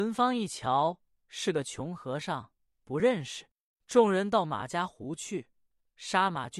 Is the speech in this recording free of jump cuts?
no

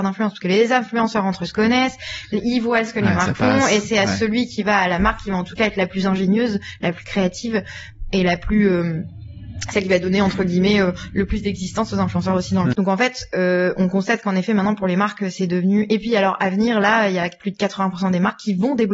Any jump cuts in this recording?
yes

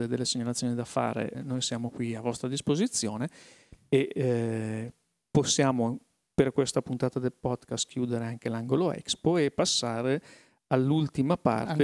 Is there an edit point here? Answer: yes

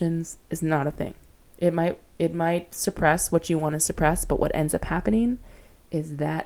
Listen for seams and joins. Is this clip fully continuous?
no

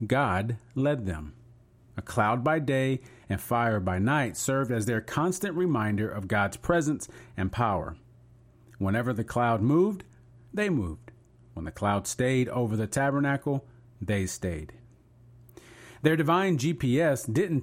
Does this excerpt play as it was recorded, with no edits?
yes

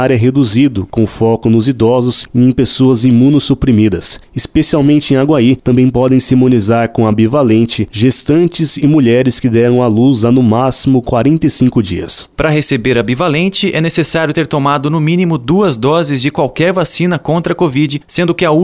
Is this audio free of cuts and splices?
no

